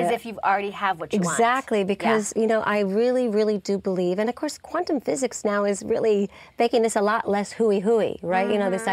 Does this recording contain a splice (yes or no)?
no